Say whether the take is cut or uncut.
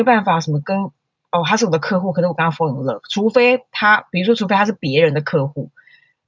uncut